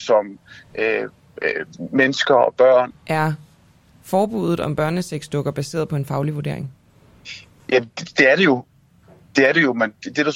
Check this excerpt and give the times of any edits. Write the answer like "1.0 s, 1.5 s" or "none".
2.9 s